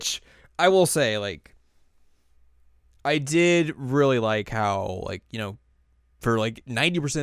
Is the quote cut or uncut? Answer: uncut